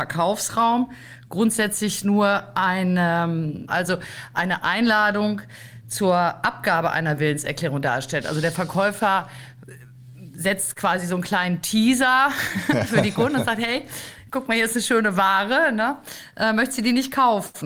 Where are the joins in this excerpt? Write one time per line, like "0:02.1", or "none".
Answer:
0:03.7